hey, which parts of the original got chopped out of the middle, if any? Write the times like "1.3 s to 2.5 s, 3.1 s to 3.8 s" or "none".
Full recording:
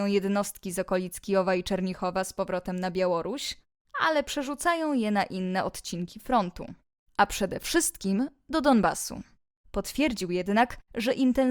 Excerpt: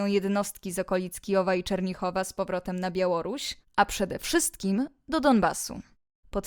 3.7 s to 7.1 s